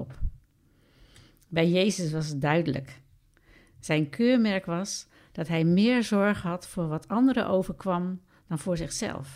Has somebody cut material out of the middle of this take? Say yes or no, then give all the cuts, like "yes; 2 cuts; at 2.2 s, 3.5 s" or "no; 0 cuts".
no; 0 cuts